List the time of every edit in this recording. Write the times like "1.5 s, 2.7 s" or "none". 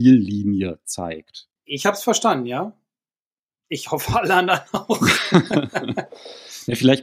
1.6 s